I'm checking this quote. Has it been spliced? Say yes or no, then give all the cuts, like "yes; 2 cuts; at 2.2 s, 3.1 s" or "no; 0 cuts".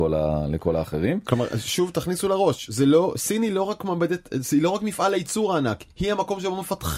no; 0 cuts